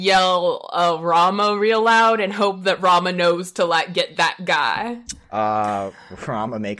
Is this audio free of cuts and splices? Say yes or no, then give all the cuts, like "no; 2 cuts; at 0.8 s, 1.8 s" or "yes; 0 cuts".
yes; 0 cuts